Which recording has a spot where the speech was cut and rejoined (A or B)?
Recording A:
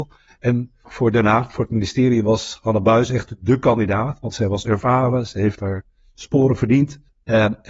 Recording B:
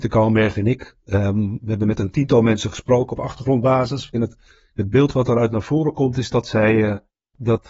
B